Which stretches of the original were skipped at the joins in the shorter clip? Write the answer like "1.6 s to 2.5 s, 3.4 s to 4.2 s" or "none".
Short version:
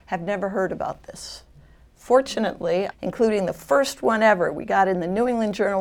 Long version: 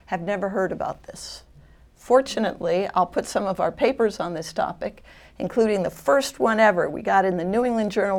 2.9 s to 5.3 s